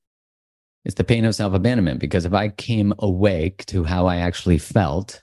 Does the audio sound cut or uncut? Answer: uncut